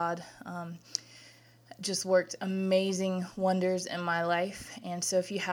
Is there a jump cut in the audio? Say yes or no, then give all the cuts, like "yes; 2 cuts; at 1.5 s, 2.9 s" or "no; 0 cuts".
no; 0 cuts